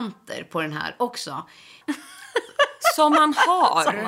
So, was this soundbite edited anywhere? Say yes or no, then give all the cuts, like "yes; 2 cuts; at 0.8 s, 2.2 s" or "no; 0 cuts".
yes; 1 cut; at 1.8 s